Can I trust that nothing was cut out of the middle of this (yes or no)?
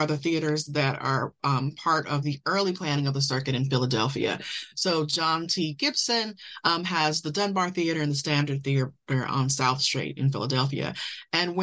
yes